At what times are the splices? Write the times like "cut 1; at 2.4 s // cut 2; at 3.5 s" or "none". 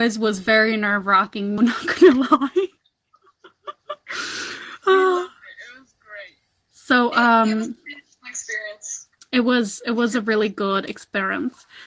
cut 1; at 1.6 s